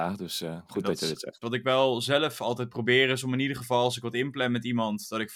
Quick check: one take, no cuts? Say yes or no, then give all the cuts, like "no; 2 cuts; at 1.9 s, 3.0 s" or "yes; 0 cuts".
no; 1 cut; at 1.4 s